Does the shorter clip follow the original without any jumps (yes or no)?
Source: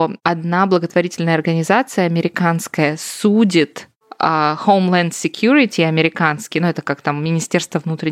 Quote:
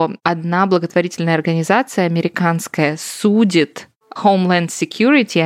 no